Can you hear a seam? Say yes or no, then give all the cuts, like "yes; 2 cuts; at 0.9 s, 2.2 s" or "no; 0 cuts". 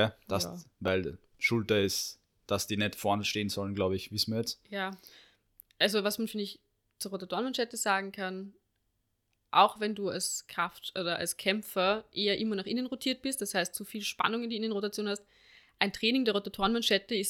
no; 0 cuts